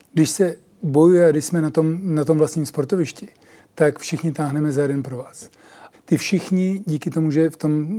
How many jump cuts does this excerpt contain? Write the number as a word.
one